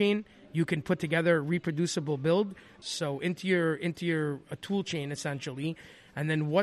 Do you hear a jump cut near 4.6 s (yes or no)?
no